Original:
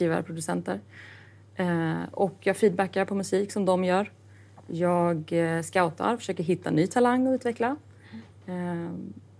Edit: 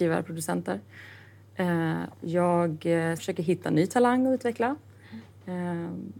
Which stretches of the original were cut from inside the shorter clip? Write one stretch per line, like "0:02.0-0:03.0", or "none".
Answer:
0:02.1-0:04.6
0:05.6-0:06.2